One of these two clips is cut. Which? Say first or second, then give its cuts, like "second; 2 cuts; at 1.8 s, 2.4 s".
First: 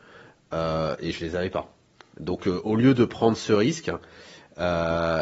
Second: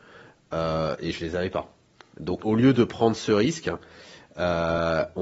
second; 1 cut; at 2.4 s